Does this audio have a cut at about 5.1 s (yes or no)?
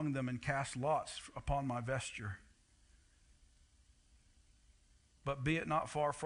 no